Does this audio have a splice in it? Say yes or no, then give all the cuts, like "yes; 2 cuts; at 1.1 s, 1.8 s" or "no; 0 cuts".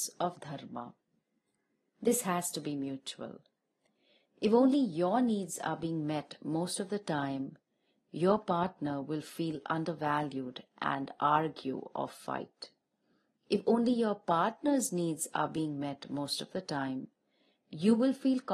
no; 0 cuts